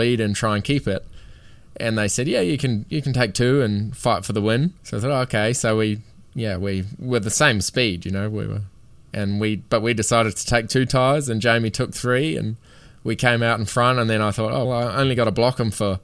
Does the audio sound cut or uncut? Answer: cut